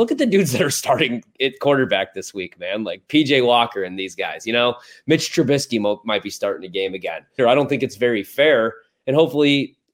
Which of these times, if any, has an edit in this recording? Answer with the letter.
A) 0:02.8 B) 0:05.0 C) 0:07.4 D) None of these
C